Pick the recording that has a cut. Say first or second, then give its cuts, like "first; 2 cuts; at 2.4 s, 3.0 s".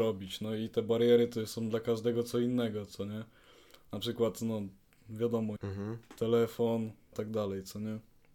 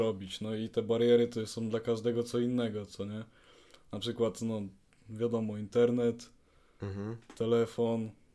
first; 2 cuts; at 5.6 s, 7.1 s